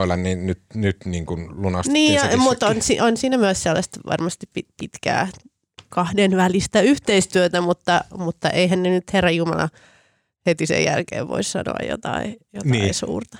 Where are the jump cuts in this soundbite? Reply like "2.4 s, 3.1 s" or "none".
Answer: none